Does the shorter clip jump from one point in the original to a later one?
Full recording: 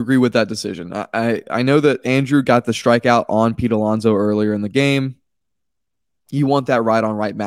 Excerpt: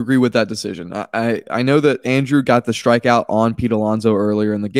no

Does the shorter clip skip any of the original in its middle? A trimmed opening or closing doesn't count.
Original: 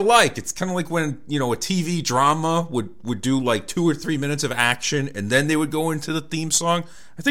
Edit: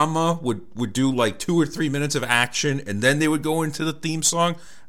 no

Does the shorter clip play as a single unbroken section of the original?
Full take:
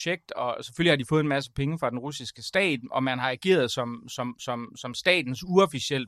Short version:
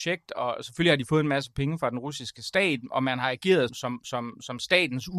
no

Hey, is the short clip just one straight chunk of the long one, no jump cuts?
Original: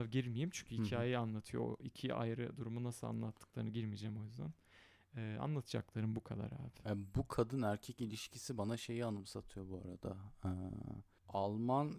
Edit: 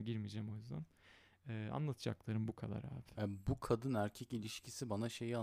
yes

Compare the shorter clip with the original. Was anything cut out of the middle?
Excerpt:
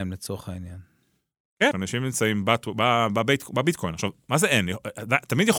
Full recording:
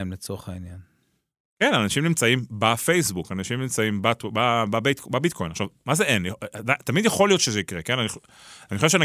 yes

